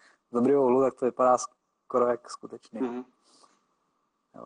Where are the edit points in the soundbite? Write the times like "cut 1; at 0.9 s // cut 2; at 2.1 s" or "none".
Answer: none